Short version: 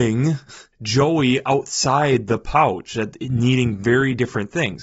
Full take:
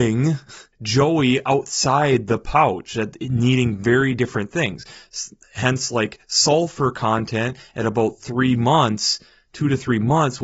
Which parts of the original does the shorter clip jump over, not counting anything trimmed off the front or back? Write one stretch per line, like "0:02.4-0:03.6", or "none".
none